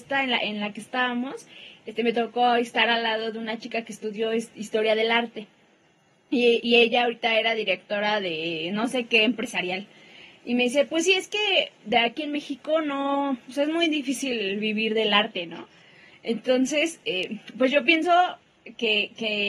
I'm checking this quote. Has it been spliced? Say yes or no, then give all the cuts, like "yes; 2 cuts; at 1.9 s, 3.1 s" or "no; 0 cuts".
no; 0 cuts